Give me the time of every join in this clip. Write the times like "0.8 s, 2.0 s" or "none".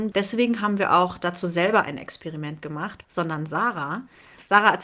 3.0 s